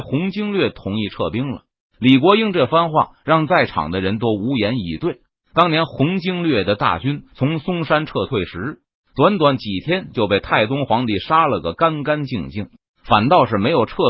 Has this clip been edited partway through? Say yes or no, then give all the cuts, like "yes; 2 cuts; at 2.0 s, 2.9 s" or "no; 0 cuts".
no; 0 cuts